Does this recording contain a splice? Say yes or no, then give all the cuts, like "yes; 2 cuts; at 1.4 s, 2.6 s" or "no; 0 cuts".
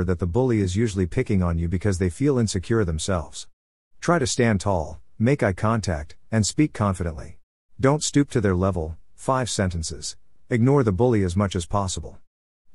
yes; 2 cuts; at 7.6 s, 10.4 s